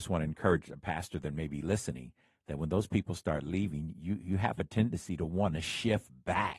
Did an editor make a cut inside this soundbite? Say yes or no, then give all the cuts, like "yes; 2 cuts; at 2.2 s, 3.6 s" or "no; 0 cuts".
no; 0 cuts